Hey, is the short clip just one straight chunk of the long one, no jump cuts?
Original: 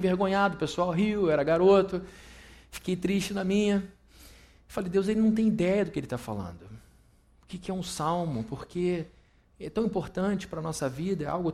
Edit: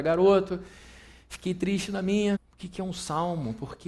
no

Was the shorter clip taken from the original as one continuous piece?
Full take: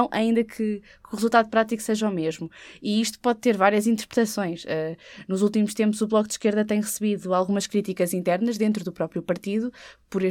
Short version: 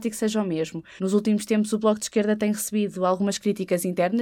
no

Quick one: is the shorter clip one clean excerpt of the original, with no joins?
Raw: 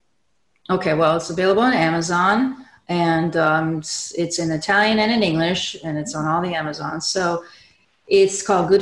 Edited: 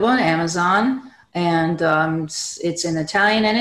yes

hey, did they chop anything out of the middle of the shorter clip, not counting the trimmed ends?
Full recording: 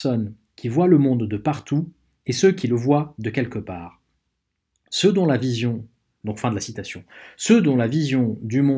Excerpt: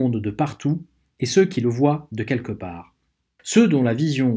yes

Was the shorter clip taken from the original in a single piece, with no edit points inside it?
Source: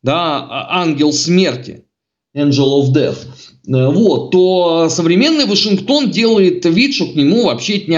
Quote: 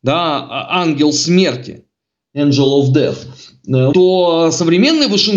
no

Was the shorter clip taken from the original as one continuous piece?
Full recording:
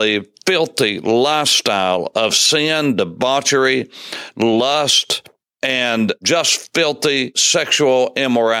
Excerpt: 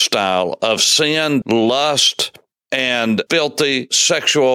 no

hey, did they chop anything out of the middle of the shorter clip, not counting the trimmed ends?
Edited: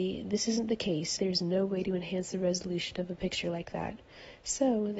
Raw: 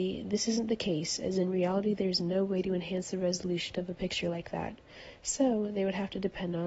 yes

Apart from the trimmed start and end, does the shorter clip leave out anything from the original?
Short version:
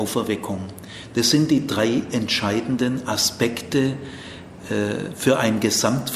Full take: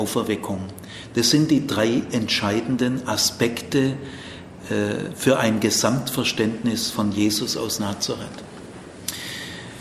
no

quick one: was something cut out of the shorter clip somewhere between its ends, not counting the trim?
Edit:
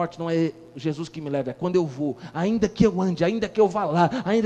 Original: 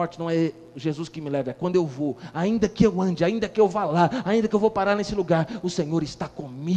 no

